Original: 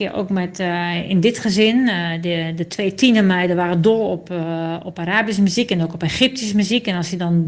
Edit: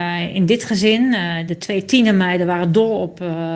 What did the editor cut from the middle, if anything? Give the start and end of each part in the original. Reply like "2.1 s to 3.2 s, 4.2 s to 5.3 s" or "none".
2.2 s to 2.6 s